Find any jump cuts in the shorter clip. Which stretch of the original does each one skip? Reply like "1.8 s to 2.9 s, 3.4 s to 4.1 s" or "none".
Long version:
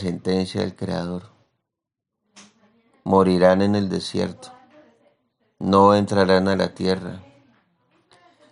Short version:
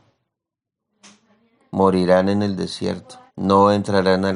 4.6 s to 5.5 s